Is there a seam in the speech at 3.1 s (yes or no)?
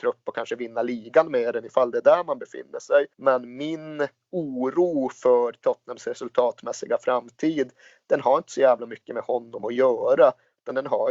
yes